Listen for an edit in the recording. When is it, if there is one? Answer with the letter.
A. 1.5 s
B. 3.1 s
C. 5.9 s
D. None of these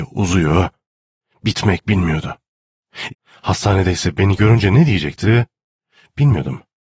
B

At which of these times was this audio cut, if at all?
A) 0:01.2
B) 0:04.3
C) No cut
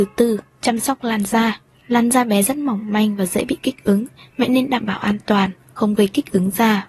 C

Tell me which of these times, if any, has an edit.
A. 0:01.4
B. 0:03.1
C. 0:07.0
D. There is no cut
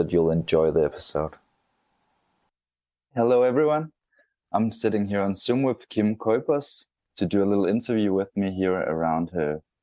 C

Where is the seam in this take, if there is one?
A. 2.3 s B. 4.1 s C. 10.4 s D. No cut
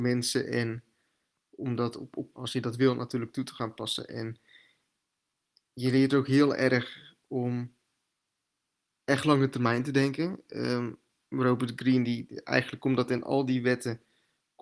A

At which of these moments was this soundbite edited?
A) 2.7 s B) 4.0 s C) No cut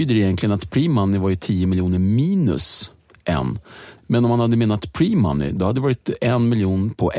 B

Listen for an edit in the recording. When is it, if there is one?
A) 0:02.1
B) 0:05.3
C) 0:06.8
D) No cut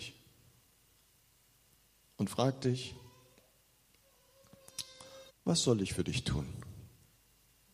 B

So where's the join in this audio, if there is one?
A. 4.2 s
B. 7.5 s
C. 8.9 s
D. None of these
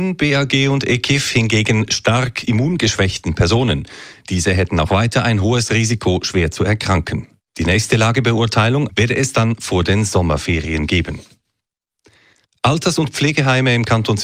C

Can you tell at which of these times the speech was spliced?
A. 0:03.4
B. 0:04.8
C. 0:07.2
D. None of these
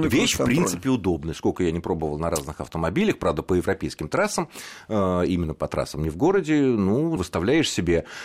C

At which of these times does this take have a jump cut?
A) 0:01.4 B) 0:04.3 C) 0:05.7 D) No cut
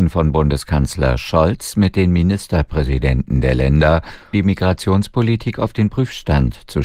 B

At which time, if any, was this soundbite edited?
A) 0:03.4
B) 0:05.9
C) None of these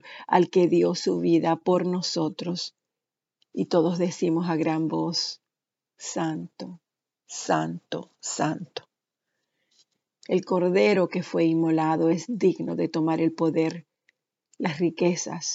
B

